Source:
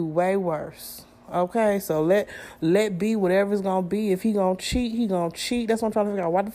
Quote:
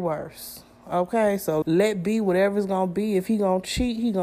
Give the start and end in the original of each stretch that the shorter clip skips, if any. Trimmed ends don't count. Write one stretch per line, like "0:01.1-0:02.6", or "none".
0:02.0-0:02.6